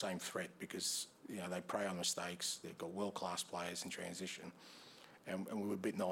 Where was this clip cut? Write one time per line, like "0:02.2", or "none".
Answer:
none